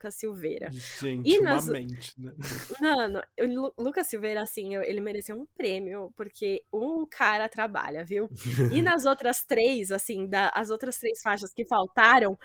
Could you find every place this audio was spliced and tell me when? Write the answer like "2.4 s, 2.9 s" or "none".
none